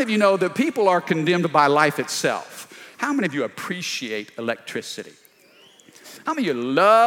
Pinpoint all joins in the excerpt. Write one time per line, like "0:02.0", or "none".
0:02.9